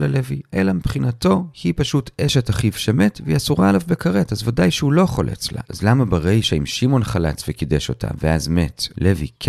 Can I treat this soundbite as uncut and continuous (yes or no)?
no